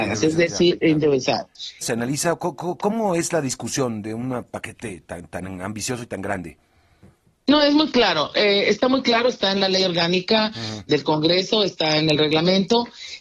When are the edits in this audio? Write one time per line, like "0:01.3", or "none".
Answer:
0:01.8